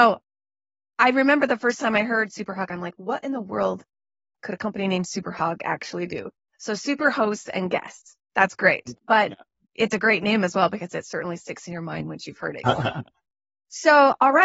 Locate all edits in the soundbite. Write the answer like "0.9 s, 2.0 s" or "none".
8.9 s, 12.6 s